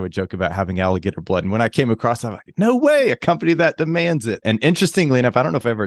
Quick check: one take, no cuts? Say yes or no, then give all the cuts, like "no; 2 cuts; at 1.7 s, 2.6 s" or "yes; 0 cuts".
no; 1 cut; at 4.4 s